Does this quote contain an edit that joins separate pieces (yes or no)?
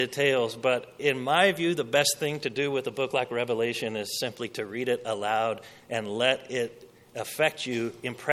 no